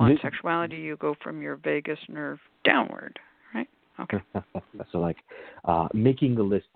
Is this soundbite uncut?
no; 1 cut; at 4.8 s

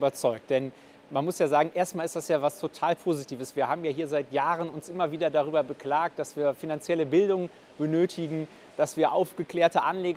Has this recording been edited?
no; 0 cuts

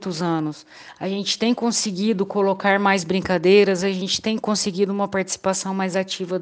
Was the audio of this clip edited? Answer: no; 0 cuts

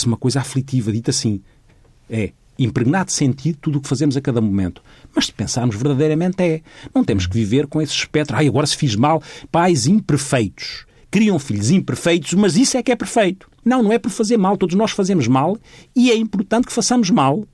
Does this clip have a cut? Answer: yes; 2 cuts; at 9.5 s, 13.6 s

